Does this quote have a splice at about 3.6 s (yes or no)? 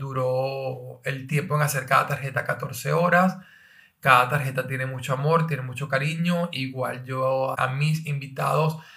no